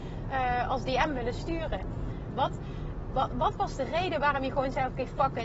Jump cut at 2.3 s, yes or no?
yes